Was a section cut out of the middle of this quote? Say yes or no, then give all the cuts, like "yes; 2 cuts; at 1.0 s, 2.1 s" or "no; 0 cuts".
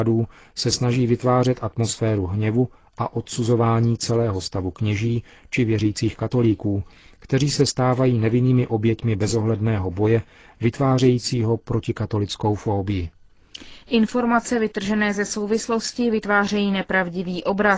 no; 0 cuts